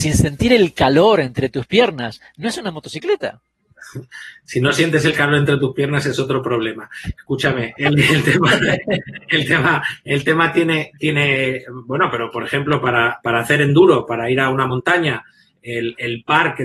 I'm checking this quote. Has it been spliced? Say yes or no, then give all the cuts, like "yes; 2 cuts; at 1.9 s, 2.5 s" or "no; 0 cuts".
no; 0 cuts